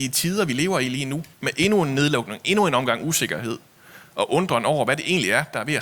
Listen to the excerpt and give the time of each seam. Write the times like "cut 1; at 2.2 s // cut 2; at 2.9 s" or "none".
cut 1; at 1.3 s